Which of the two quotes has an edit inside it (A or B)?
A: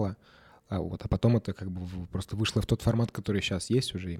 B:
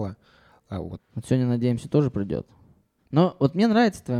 B